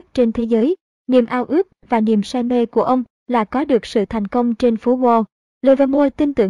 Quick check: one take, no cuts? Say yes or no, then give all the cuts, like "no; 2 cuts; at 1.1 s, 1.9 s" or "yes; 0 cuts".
yes; 0 cuts